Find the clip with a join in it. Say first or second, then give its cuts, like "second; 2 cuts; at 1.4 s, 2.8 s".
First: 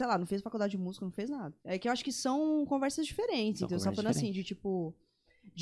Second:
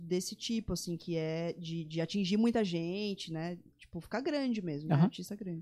first; 1 cut; at 1.6 s